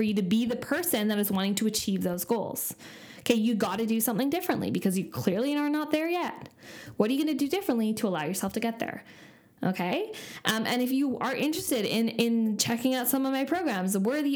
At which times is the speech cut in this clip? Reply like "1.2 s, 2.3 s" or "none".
none